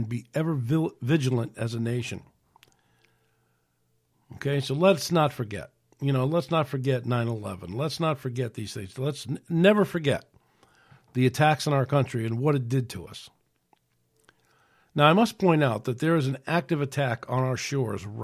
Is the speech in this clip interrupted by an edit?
no; 0 cuts

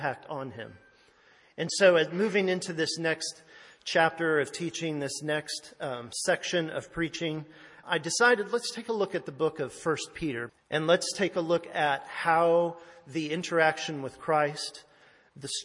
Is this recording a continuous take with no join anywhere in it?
no; 2 cuts; at 7.8 s, 10.5 s

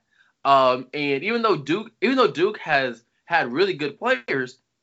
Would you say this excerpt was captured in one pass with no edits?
yes; 0 cuts

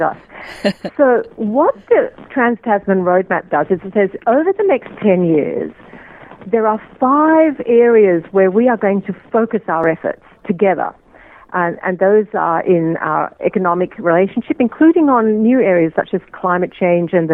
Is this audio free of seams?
yes; 0 cuts

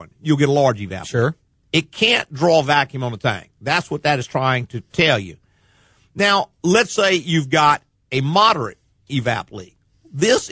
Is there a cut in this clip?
no; 0 cuts

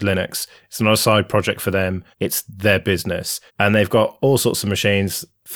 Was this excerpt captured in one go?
no; 2 cuts; at 2.1 s, 3.5 s

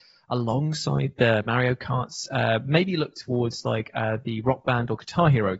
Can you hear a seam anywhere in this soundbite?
no; 0 cuts

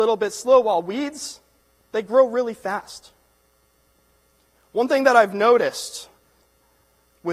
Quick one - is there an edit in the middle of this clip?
no; 0 cuts

